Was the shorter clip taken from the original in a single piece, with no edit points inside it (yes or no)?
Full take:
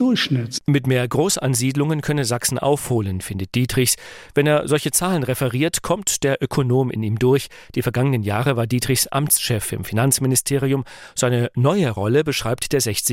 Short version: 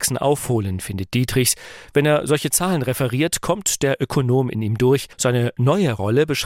no